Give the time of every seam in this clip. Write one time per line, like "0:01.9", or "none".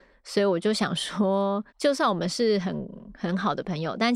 0:01.7